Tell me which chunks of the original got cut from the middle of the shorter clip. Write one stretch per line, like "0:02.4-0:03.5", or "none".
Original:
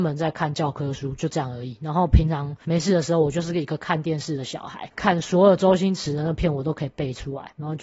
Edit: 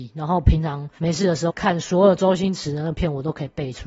0:03.2-0:04.9